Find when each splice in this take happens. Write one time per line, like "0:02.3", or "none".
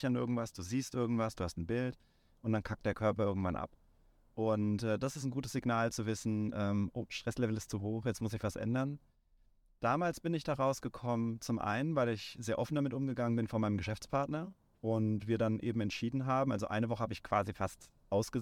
none